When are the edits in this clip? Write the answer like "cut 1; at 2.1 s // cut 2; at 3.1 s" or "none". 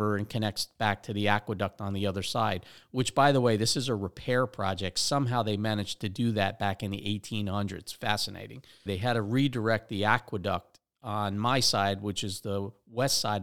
cut 1; at 8.9 s